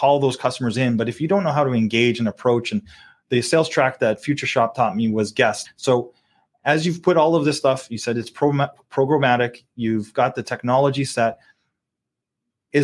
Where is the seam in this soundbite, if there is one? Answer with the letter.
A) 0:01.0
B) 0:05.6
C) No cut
B